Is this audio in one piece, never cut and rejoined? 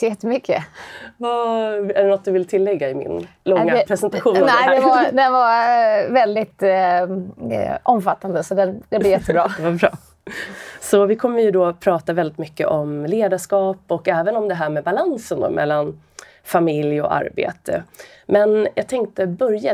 yes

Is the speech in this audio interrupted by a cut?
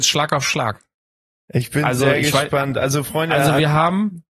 no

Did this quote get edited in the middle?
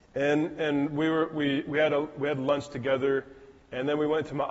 no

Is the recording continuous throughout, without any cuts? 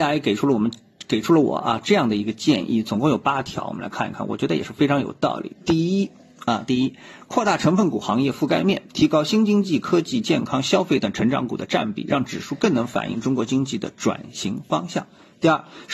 yes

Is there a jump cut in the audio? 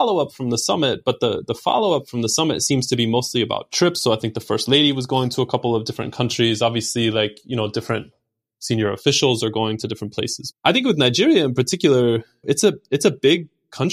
yes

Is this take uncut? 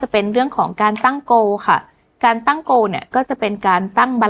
yes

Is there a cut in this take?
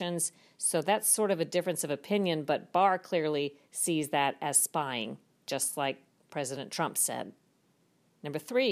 no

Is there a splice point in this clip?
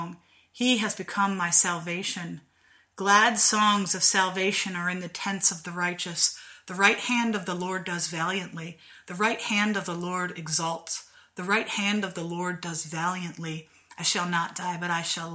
no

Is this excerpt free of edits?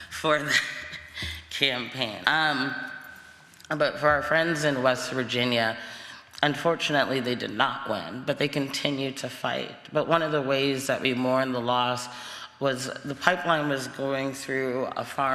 no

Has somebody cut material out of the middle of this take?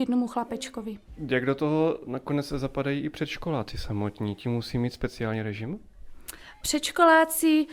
no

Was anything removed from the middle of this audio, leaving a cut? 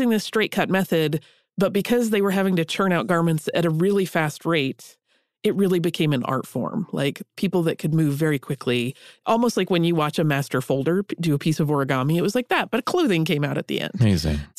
no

